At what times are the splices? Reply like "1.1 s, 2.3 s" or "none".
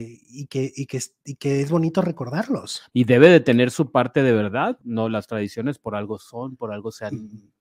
2.9 s, 4.8 s